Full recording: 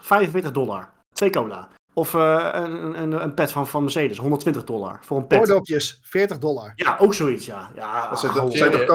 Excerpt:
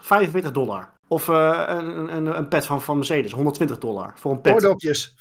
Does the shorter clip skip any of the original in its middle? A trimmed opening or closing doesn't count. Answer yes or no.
yes